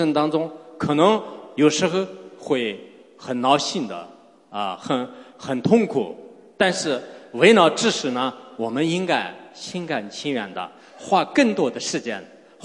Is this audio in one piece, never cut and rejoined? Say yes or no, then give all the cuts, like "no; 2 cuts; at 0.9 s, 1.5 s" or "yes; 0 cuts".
yes; 0 cuts